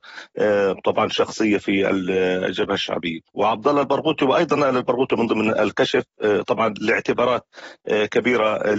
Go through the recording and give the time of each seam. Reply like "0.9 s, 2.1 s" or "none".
3.3 s